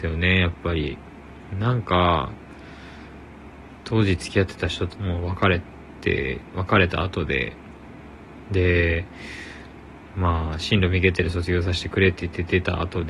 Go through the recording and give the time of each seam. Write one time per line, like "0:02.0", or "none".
0:04.9